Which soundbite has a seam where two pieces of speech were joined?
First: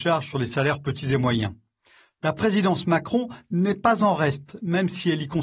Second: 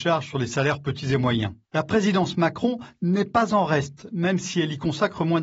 second; 1 cut; at 1.6 s

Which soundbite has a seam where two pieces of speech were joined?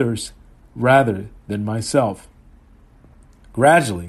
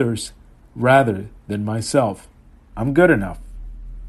second; 1 cut; at 2.7 s

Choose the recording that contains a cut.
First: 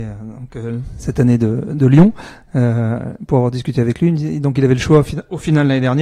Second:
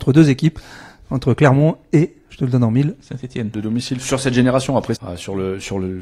second; 2 cuts; at 3.5 s, 5.0 s

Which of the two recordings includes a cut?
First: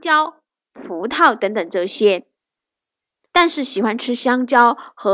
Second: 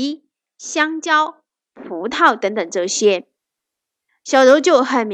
second; 1 cut; at 4.1 s

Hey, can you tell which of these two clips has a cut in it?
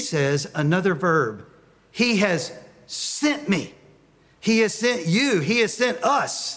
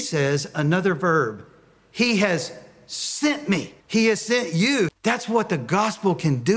second; 2 cuts; at 3.8 s, 4.9 s

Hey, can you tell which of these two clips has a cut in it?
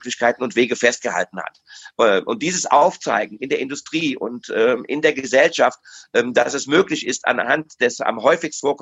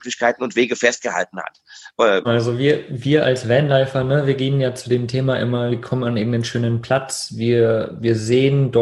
second; 2 cuts; at 2.2 s, 5.7 s

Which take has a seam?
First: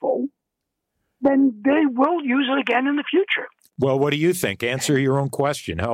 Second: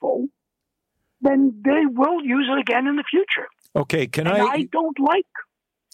first; 1 cut; at 3.7 s

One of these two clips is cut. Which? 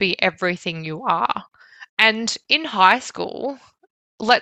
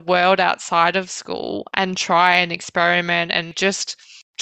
first; 1 cut; at 1.9 s

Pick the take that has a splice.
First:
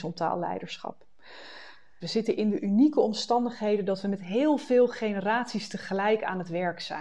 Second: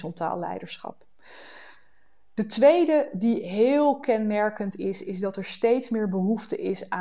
first; 1 cut; at 2.0 s

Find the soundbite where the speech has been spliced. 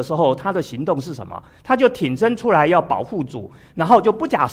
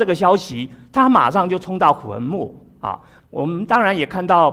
second; 1 cut; at 3.2 s

